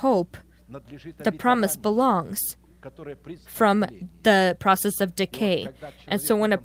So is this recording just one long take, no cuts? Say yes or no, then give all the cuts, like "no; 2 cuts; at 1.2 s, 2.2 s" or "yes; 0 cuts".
no; 1 cut; at 3.4 s